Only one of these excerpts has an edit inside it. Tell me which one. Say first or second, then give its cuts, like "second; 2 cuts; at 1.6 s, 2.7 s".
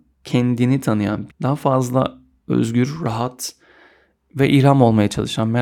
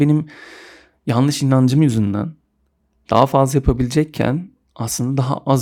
first; 1 cut; at 1.3 s